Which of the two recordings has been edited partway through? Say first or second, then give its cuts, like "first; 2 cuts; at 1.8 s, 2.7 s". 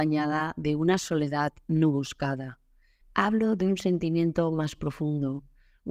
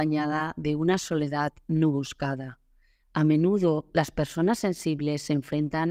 first; 1 cut; at 3.0 s